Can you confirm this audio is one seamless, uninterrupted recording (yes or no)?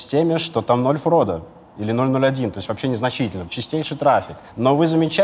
no